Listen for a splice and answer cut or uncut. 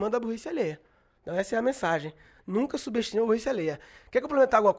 uncut